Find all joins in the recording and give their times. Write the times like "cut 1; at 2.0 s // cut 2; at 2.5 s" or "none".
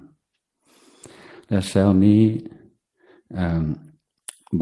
none